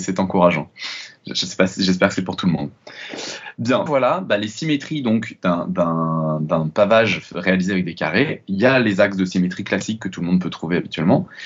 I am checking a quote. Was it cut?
yes; 1 cut; at 3.9 s

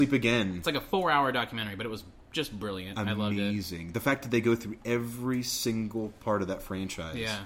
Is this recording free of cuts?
yes; 0 cuts

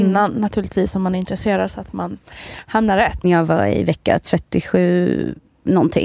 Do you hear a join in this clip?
yes; 1 cut; at 3.2 s

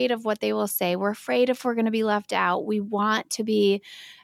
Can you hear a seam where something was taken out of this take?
no; 0 cuts

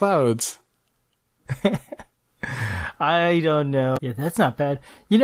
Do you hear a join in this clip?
yes; 1 cut; at 4.0 s

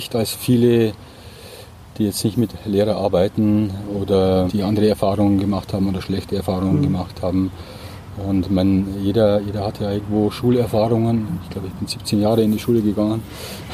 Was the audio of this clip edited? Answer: yes; 1 cut; at 4.5 s

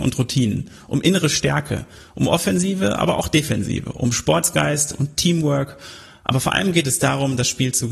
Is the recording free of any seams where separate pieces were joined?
yes; 0 cuts

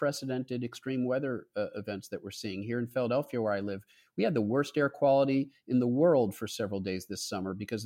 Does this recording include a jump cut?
no; 0 cuts

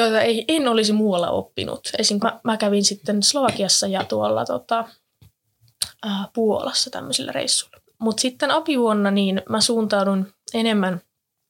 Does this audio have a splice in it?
yes; 2 cuts; at 2.2 s, 7.9 s

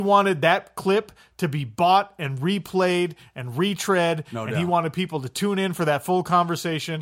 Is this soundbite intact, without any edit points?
yes; 0 cuts

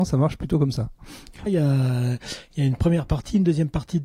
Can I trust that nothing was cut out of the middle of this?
no; 1 cut; at 1.5 s

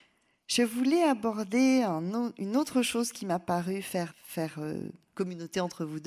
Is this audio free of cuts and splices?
no; 1 cut; at 4.1 s

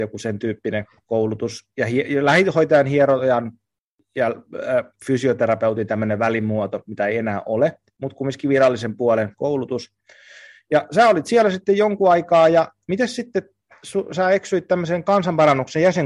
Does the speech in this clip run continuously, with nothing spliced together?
yes; 0 cuts

